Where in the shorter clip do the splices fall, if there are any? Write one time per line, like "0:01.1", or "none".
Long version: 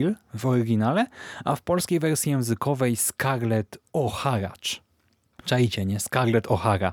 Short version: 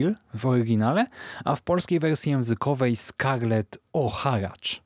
none